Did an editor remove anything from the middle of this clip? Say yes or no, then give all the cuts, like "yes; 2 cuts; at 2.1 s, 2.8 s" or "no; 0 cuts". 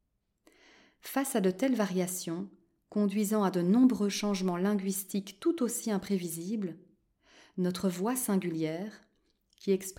no; 0 cuts